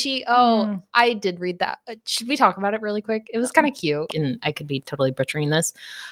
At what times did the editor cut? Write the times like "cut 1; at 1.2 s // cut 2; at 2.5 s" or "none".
cut 1; at 4.1 s